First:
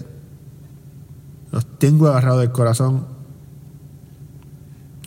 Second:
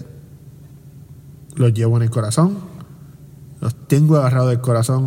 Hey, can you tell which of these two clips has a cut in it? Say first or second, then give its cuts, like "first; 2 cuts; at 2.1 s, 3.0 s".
first; 1 cut; at 1.5 s